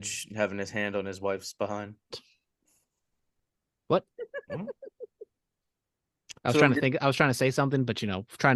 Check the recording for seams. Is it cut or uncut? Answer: cut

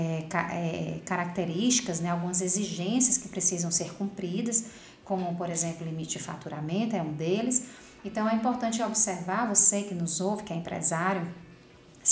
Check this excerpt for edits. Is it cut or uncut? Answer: uncut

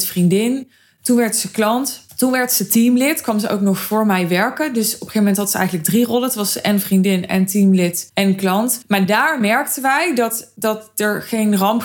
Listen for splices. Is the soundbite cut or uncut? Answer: uncut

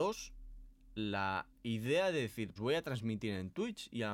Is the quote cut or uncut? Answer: cut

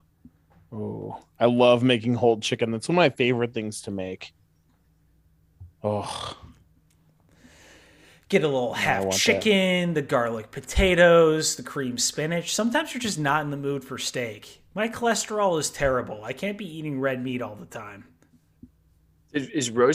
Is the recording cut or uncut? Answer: uncut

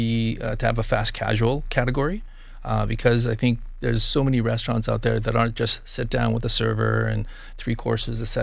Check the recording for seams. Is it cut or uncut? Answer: uncut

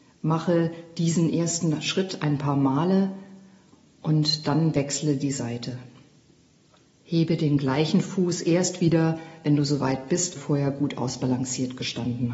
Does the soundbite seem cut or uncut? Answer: cut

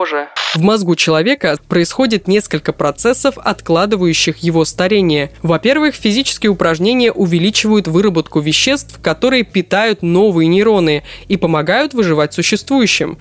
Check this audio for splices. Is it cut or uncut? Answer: cut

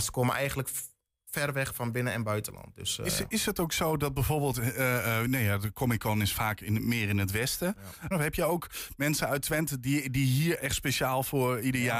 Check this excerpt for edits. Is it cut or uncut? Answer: cut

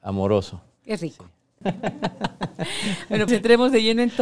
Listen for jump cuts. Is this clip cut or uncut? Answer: cut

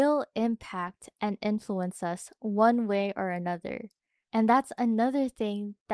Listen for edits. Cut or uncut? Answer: uncut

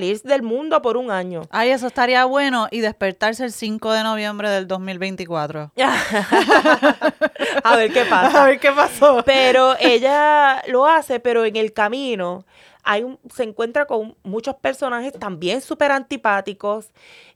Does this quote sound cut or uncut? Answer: uncut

